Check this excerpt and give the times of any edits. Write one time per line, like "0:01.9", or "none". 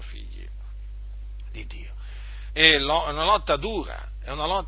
0:02.5